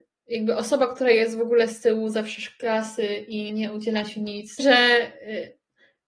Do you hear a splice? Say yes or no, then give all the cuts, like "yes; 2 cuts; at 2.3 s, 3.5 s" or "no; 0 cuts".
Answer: yes; 2 cuts; at 3.5 s, 4.6 s